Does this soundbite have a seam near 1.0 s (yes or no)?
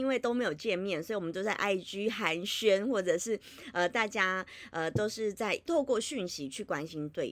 no